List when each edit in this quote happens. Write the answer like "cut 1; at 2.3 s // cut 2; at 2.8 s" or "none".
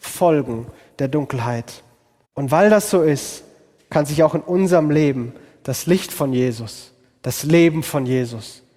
cut 1; at 2.2 s